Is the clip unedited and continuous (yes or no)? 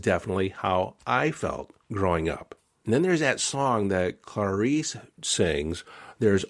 yes